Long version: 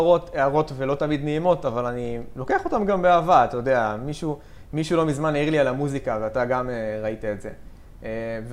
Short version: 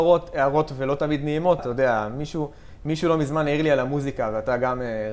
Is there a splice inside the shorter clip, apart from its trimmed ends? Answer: yes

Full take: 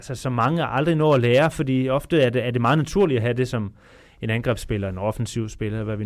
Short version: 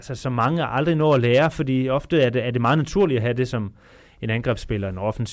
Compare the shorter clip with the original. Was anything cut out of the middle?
no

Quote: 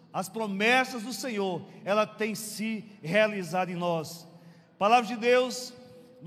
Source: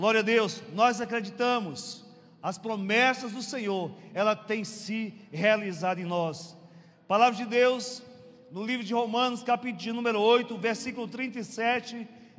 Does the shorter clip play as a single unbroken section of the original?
yes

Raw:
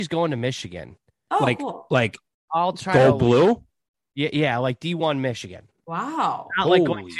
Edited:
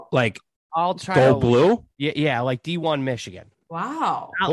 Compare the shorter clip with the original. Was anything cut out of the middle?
yes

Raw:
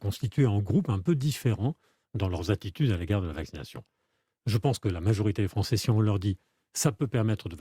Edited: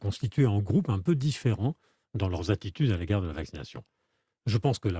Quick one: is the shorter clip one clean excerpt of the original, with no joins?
yes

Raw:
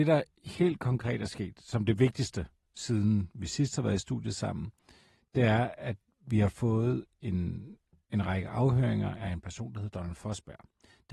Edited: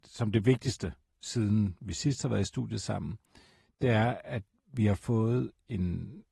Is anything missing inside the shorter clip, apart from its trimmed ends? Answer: no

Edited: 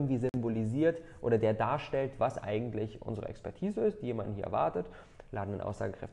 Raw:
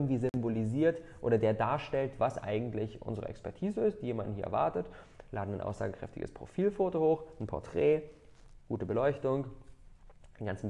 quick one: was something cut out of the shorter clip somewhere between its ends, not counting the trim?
no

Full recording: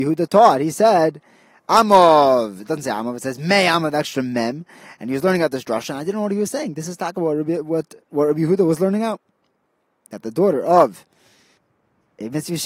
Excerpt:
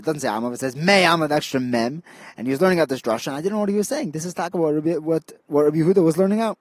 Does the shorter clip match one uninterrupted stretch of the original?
yes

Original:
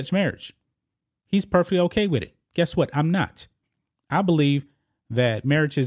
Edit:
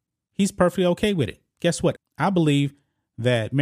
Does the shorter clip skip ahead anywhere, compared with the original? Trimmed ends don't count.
yes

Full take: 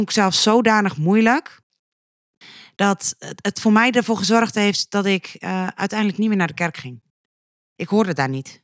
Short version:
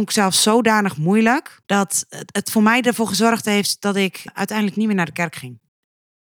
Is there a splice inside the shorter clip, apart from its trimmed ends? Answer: yes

